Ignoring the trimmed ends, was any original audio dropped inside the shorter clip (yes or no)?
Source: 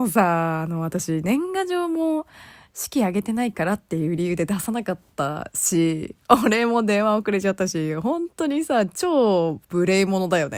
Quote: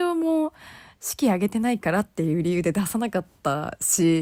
no